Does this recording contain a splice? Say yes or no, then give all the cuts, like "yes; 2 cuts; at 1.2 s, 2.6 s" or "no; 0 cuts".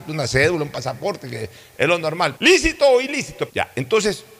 yes; 2 cuts; at 2.4 s, 3.5 s